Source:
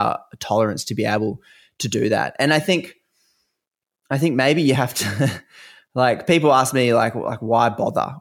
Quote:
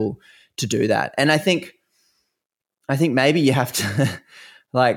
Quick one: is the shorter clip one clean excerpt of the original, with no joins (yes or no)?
yes